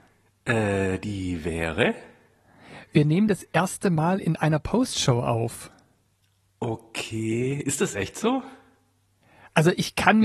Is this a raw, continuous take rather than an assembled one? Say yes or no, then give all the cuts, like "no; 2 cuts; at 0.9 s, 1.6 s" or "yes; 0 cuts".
yes; 0 cuts